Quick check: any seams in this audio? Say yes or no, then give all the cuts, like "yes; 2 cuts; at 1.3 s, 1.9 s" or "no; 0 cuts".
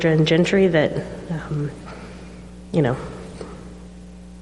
no; 0 cuts